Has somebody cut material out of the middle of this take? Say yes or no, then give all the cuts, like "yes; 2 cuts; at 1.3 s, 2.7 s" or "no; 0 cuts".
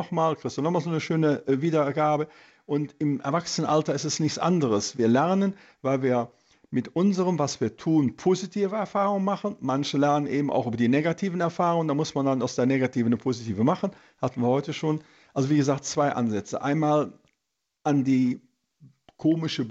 no; 0 cuts